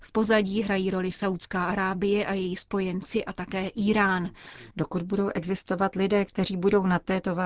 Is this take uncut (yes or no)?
no